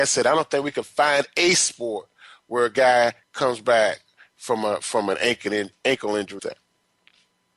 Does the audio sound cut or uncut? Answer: cut